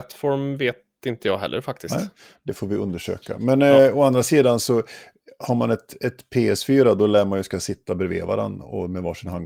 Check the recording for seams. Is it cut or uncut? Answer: uncut